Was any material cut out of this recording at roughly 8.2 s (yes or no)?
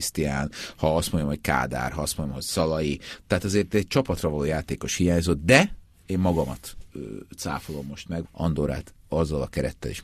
yes